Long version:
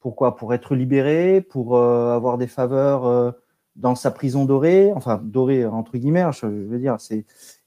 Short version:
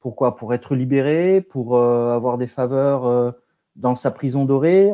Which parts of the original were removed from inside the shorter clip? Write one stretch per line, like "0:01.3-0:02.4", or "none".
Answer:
none